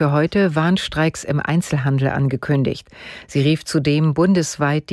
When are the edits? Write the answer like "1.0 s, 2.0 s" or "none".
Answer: none